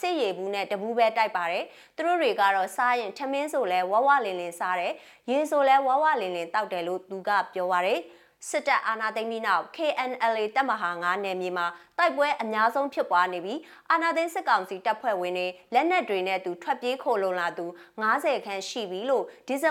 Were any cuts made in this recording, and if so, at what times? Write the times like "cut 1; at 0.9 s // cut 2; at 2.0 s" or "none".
none